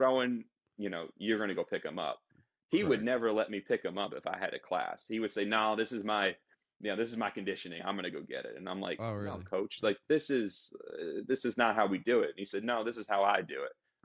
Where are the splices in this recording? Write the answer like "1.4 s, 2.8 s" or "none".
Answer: none